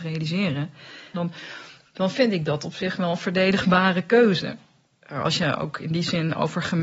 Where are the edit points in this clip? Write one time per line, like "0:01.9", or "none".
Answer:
0:01.1